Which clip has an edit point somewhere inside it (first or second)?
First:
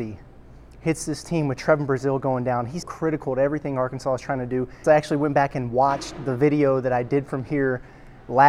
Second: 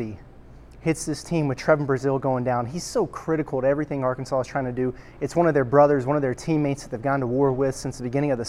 first